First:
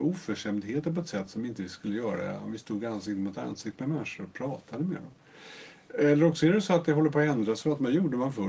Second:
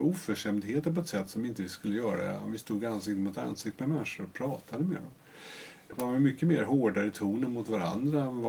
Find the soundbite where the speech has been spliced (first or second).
second